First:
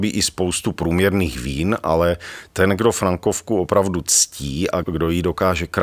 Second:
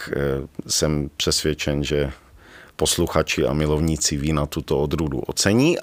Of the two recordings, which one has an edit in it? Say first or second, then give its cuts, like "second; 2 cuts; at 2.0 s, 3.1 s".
first; 1 cut; at 4.8 s